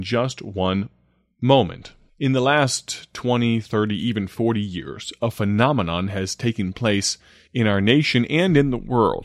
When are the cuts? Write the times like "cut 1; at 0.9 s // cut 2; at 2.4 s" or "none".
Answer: cut 1; at 2.1 s